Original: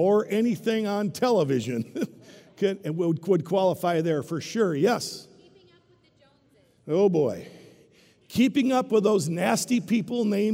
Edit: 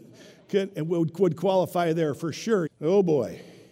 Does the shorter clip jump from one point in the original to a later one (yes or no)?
yes